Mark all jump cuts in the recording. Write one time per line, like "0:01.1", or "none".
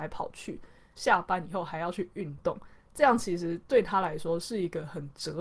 0:01.0